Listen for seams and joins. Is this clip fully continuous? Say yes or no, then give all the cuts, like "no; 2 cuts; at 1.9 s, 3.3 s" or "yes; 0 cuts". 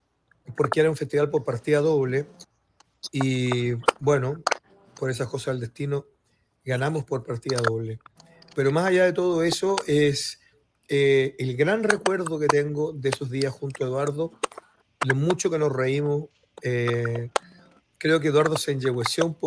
yes; 0 cuts